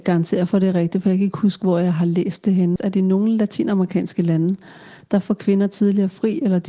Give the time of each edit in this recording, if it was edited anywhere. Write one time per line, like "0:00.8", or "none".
0:02.8